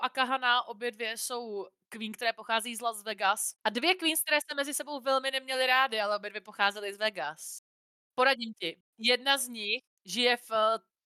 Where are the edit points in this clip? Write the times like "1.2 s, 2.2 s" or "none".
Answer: 3.6 s